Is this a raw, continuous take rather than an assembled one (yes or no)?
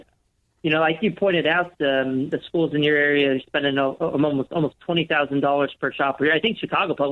yes